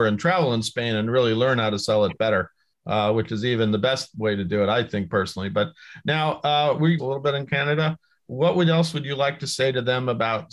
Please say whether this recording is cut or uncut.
cut